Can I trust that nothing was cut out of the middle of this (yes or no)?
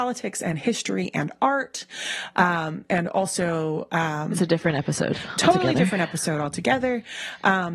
yes